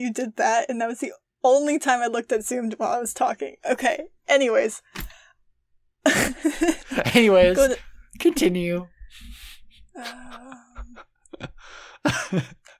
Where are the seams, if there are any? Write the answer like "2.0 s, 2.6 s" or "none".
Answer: none